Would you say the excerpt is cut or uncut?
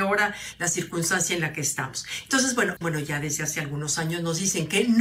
cut